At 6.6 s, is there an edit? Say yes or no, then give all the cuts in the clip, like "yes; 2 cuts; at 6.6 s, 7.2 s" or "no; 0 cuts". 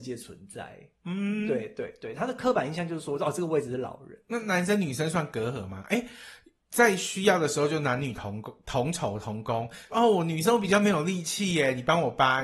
no; 2 cuts; at 2.1 s, 9.9 s